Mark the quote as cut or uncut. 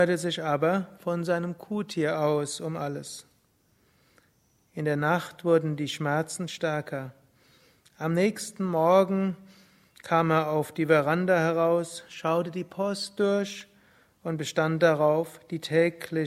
uncut